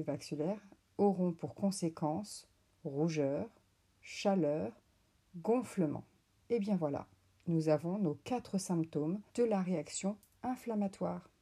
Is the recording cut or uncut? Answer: cut